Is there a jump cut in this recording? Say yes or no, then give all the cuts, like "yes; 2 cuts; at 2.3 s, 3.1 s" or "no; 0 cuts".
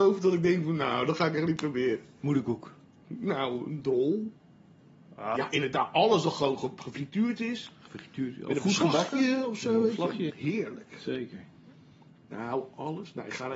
yes; 2 cuts; at 5.3 s, 10.3 s